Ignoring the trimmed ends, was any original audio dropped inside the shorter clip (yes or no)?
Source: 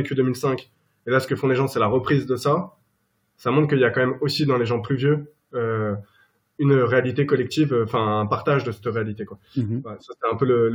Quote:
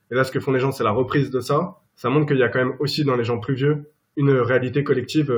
yes